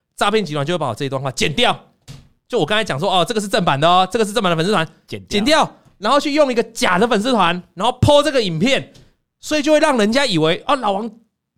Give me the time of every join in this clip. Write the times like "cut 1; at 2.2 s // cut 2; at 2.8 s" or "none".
none